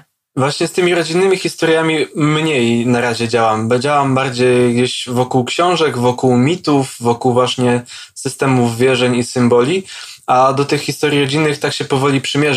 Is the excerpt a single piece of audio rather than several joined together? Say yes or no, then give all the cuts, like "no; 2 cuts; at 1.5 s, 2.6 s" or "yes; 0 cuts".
yes; 0 cuts